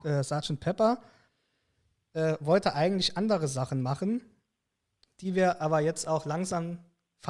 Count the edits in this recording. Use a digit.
0